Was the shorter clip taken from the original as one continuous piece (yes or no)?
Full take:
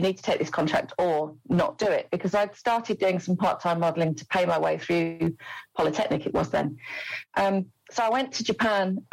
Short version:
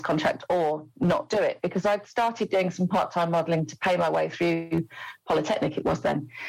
yes